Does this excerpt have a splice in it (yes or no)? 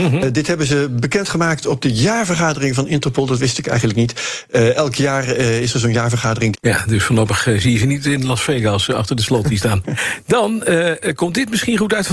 yes